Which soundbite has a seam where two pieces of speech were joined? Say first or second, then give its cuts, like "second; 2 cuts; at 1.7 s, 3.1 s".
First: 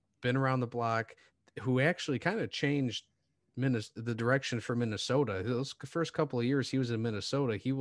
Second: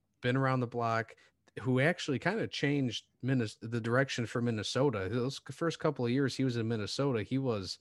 second; 1 cut; at 3.1 s